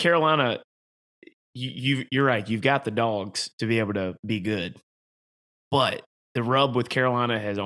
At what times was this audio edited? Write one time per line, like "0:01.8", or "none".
none